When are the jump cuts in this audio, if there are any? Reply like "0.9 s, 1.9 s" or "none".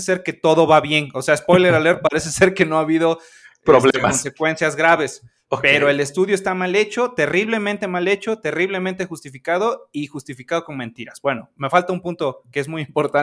none